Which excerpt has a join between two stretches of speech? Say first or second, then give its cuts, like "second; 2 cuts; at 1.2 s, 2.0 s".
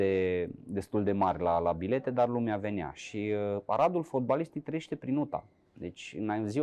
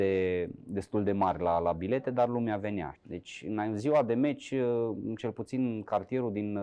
second; 1 cut; at 2.9 s